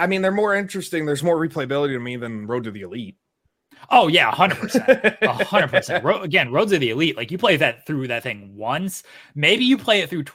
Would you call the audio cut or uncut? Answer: uncut